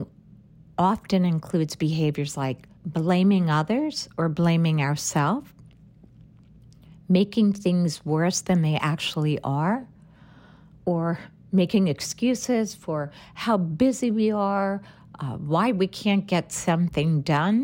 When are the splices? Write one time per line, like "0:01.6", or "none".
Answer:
0:02.8